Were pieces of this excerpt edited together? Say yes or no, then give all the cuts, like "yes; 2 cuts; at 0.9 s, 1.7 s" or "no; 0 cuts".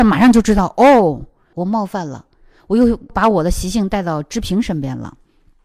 yes; 1 cut; at 1.5 s